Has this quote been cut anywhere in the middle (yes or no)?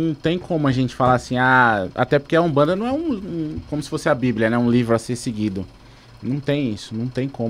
no